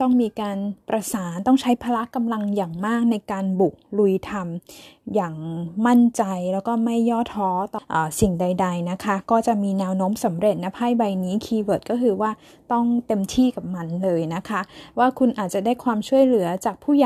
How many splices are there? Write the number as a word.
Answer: one